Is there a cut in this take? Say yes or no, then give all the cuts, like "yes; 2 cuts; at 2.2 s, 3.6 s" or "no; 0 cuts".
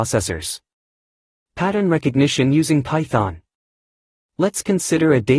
no; 0 cuts